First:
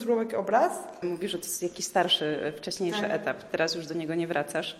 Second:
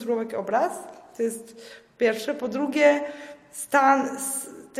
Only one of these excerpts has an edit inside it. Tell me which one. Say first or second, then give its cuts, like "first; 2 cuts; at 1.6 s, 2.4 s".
first; 1 cut; at 1.0 s